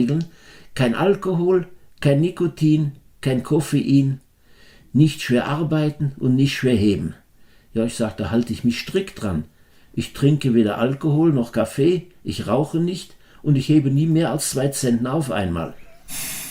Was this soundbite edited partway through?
no; 0 cuts

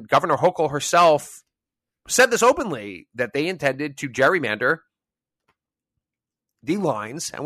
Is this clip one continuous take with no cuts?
yes; 0 cuts

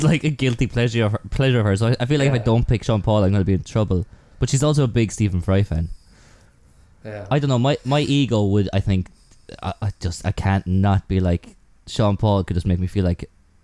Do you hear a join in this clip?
no; 0 cuts

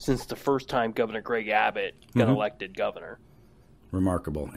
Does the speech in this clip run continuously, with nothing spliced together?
yes; 0 cuts

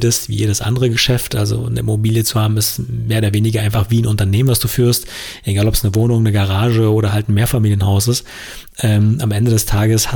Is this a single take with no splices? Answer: yes; 0 cuts

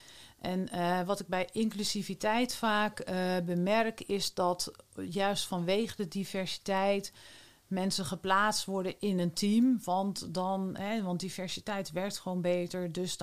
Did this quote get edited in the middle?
no; 0 cuts

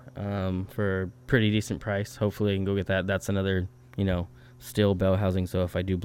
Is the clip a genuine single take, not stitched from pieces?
yes; 0 cuts

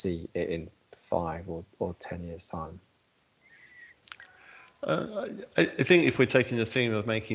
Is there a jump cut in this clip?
no; 0 cuts

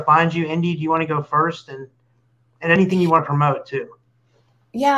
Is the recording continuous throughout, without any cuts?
yes; 0 cuts

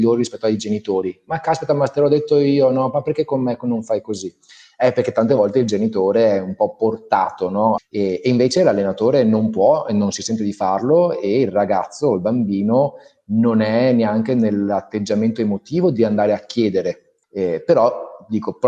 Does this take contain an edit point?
yes; 2 cuts; at 7.8 s, 17.2 s

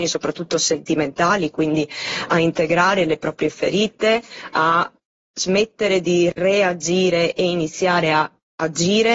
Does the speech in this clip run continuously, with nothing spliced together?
yes; 0 cuts

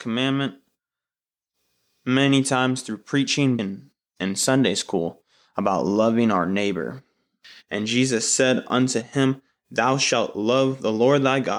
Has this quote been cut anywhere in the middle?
yes; 2 cuts; at 3.6 s, 7.6 s

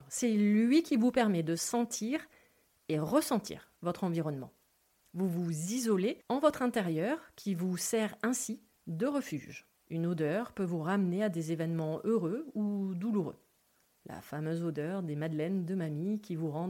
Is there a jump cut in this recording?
yes; 2 cuts; at 5.1 s, 9.8 s

